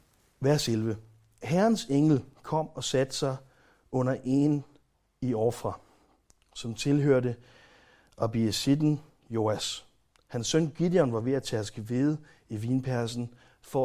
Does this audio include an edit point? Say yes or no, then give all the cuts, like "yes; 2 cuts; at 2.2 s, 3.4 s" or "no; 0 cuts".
no; 0 cuts